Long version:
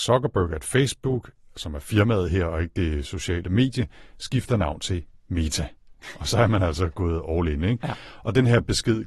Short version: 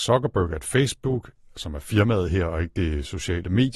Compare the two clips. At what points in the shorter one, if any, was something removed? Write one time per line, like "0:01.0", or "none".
none

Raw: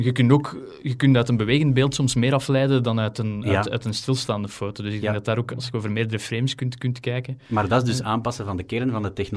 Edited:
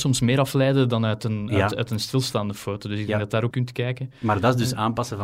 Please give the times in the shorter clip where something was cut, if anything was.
0:03.5

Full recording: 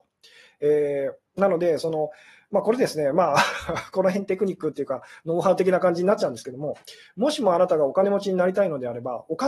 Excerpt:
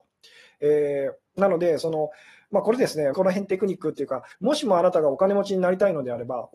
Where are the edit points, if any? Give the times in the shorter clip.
0:03.1
0:04.3

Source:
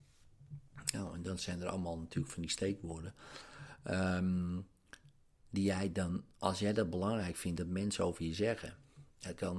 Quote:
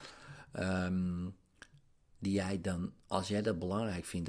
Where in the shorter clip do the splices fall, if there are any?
none

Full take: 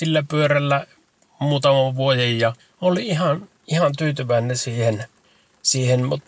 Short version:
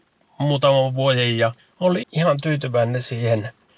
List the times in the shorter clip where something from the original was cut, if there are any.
0:02.0

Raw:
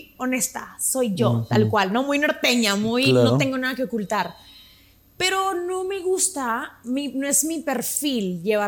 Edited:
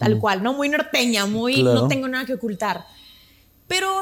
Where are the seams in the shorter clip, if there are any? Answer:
none

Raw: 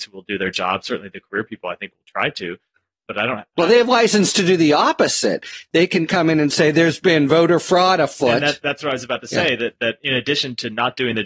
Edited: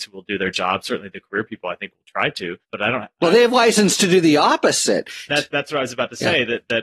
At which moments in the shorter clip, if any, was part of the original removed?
0:02.6
0:05.3

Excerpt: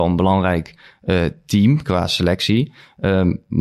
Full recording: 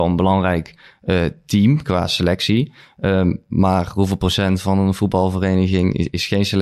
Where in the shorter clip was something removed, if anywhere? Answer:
none

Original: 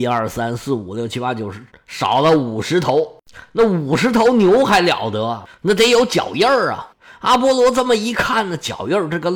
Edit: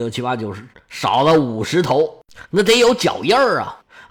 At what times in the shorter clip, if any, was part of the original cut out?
0:02.5

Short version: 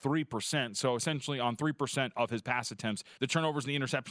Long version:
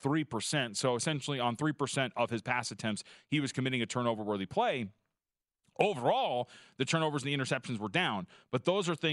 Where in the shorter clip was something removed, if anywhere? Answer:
0:03.2

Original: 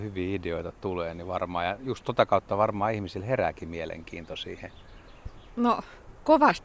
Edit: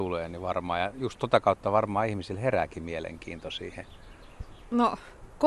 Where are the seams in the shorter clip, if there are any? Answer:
none

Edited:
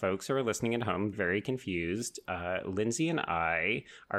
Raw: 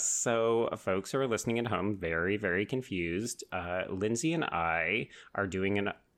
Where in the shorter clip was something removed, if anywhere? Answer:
0:01.1

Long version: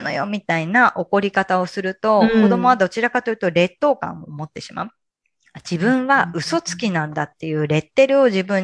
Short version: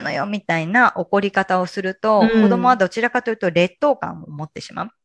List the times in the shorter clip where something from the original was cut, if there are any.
none

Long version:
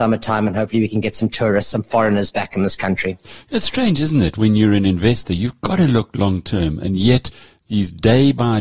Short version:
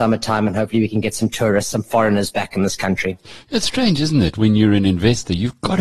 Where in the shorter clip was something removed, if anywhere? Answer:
none

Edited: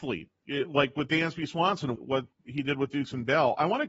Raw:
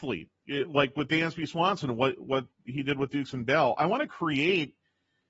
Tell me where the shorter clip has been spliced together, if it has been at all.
0:02.0

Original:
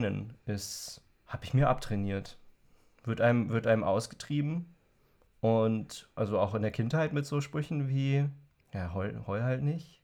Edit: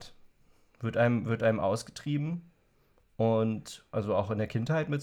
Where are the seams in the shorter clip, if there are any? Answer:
none

